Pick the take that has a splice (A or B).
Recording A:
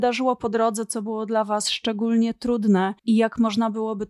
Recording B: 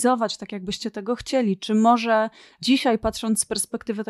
A